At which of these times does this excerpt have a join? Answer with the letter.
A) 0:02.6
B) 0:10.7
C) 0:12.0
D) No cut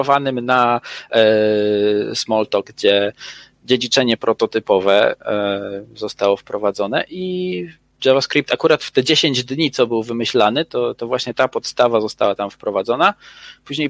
A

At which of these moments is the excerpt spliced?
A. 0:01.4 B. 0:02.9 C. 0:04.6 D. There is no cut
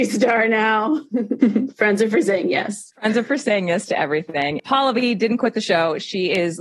A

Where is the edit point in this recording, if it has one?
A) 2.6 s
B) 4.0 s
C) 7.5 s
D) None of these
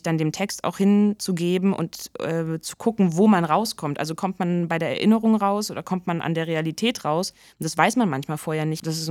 D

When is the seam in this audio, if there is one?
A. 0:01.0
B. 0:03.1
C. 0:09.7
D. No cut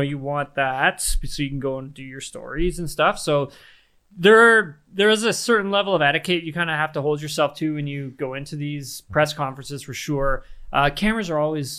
D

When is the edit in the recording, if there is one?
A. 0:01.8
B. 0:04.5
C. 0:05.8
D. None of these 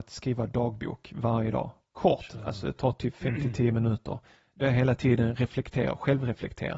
D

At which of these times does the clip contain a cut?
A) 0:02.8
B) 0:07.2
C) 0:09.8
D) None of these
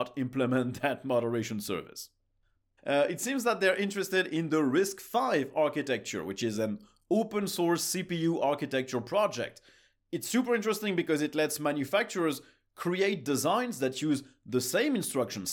A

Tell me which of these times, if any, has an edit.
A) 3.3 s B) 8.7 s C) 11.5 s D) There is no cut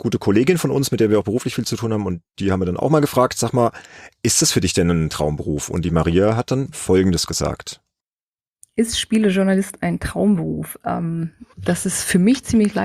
C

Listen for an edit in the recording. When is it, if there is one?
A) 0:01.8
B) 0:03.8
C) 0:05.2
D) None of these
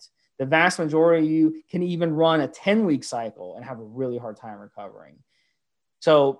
D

